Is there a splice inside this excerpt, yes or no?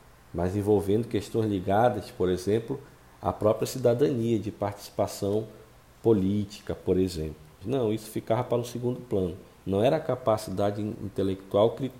yes